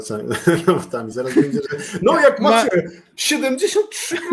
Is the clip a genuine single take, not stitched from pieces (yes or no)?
yes